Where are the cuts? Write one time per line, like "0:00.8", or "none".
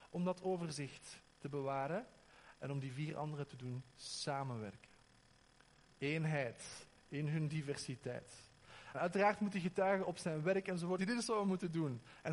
0:08.9
0:11.0